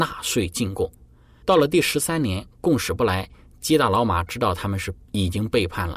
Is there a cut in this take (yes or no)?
yes